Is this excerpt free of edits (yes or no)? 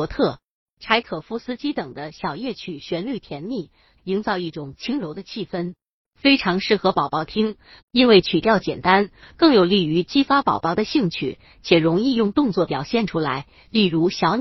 no